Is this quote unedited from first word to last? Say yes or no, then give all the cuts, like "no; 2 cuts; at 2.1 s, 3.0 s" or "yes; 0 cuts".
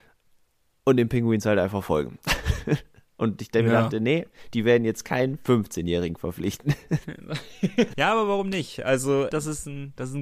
no; 2 cuts; at 7.9 s, 9.3 s